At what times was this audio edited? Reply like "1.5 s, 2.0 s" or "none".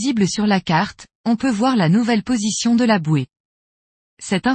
1.2 s